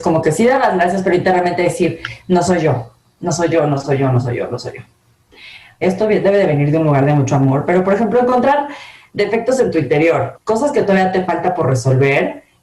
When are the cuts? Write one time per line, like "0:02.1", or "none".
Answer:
0:05.8
0:10.3